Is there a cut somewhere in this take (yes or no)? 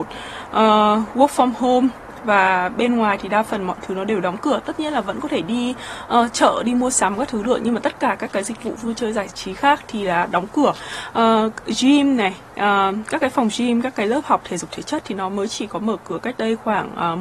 no